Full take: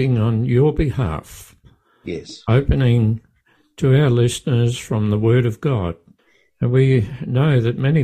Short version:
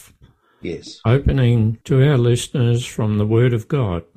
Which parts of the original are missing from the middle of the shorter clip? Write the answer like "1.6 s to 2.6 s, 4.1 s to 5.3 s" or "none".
3.2 s to 3.7 s

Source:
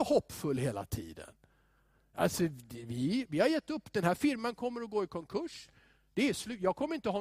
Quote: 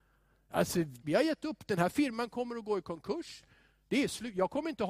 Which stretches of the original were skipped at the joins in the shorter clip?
2.7 s to 3.3 s

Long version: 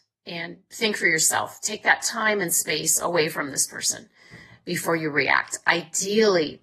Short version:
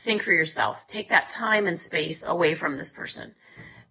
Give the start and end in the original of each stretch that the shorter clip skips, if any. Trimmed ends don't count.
none

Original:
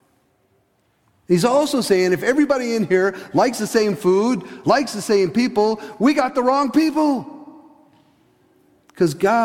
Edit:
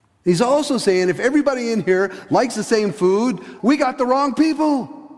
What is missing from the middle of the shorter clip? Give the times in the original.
4.6 s to 6.0 s

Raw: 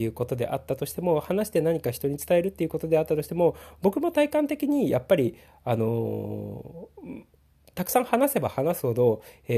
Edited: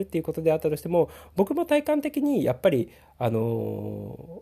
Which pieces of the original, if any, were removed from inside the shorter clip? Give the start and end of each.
none

